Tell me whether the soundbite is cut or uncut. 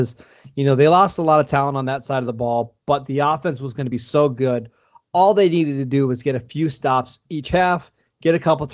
uncut